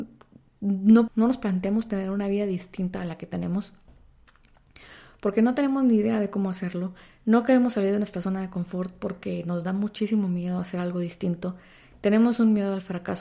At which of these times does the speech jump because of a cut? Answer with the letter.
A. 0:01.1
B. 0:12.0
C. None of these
A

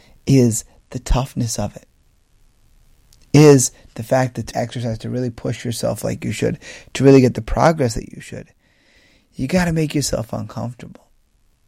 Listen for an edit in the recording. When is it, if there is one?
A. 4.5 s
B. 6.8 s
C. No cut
A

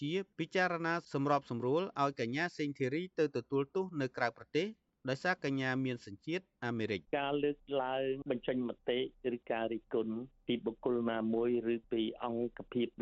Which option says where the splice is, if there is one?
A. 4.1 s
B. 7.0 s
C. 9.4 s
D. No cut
B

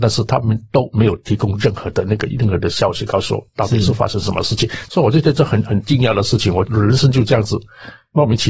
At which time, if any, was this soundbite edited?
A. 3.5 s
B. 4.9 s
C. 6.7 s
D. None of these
D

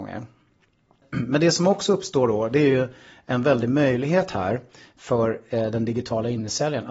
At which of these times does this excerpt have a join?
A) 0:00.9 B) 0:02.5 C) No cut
C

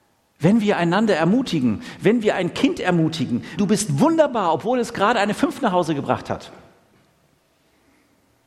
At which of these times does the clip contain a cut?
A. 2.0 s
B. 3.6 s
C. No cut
B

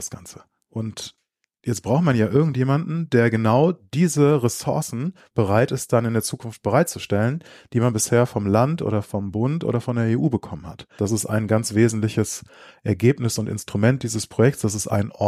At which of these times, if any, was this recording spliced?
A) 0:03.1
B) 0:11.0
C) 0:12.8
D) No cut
B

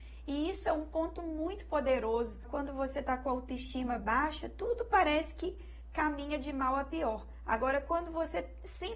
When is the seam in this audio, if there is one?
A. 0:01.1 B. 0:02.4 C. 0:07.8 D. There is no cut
B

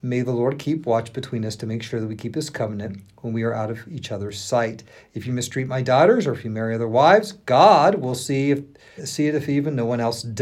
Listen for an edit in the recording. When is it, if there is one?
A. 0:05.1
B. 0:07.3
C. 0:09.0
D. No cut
C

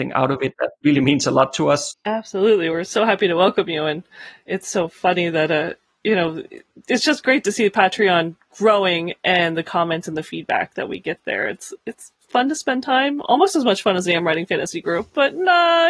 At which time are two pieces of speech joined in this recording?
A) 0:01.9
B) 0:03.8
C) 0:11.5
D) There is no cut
A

